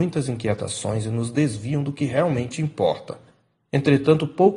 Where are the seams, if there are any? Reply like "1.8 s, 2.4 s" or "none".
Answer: 3.6 s